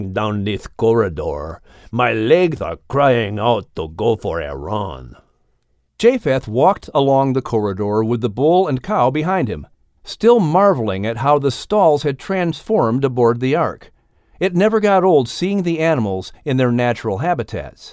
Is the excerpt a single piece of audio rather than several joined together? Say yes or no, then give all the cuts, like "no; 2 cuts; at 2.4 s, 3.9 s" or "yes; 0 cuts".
no; 1 cut; at 5.9 s